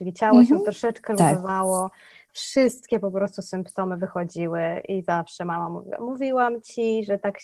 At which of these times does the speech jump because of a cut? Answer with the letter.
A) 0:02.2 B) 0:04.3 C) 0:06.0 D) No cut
D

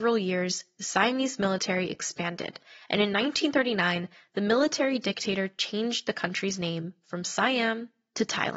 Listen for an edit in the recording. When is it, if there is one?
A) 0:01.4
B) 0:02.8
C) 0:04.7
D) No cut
D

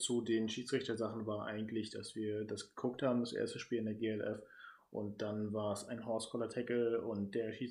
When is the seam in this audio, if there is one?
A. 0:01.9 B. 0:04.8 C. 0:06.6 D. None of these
D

